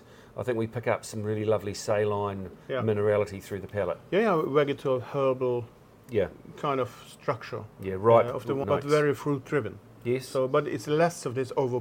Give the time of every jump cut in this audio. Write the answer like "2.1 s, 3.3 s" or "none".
8.6 s